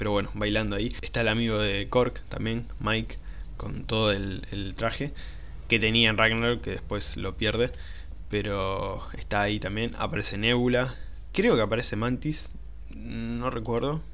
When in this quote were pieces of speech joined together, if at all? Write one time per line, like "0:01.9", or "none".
none